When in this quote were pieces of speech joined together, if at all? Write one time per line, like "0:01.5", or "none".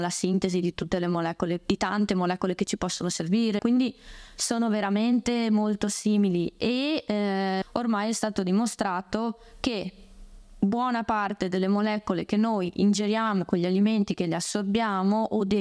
0:03.6
0:07.6